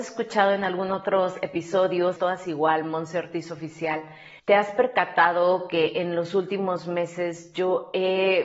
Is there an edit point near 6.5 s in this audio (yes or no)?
no